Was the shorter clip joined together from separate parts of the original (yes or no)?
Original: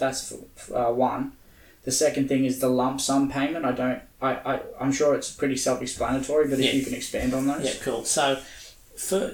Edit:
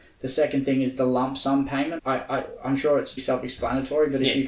yes